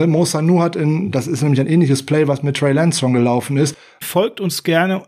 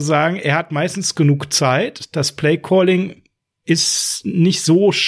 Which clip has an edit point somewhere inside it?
first; 1 cut; at 4.0 s

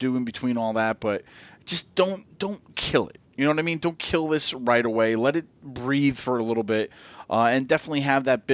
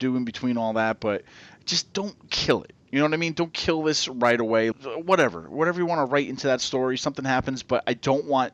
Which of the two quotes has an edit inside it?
second; 2 cuts; at 1.9 s, 4.7 s

